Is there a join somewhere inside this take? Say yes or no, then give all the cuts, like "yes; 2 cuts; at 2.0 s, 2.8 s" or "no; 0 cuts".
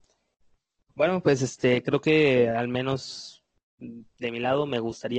no; 0 cuts